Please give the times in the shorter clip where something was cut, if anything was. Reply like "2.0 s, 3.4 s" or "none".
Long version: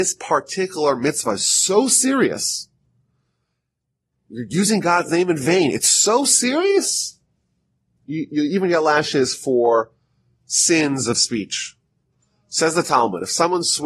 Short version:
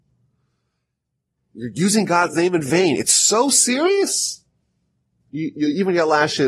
none